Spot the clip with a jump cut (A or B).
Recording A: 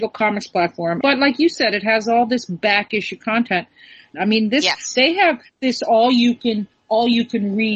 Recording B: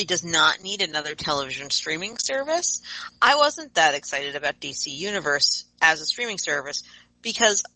A